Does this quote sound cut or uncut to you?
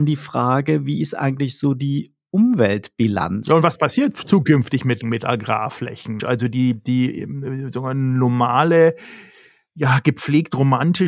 cut